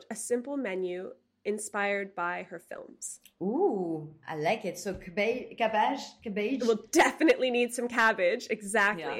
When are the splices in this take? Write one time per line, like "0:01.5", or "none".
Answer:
none